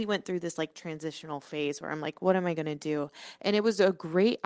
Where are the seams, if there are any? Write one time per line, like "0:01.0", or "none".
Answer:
0:03.4